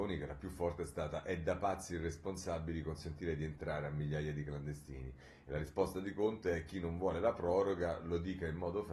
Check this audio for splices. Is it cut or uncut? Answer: uncut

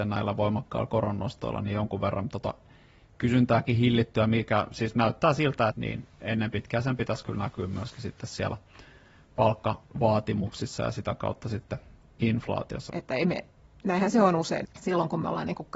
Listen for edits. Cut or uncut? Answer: cut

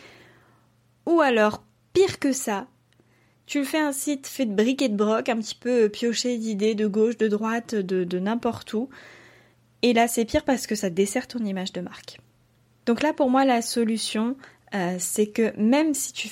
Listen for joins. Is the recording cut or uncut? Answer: uncut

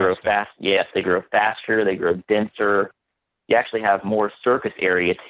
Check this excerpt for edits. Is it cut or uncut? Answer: uncut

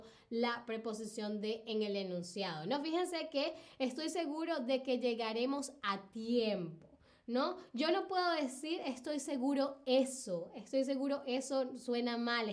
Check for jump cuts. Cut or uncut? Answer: uncut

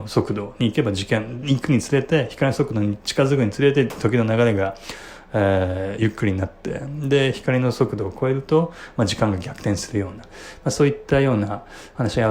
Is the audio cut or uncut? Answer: uncut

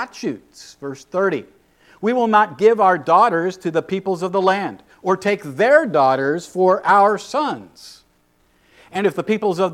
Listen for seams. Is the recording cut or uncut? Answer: uncut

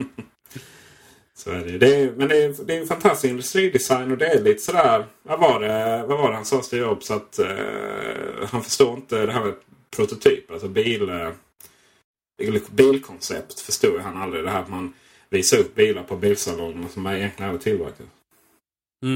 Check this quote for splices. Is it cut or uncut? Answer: uncut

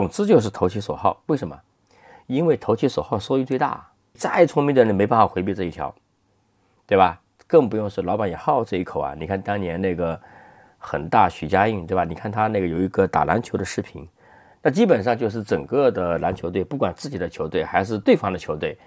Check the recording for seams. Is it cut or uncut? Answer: uncut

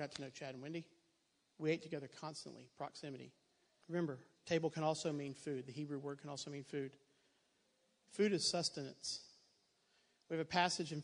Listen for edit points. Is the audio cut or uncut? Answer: cut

